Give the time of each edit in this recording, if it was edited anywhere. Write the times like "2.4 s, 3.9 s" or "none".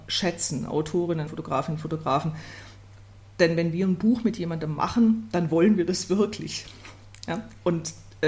1.3 s

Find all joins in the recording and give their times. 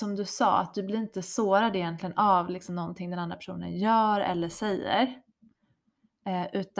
none

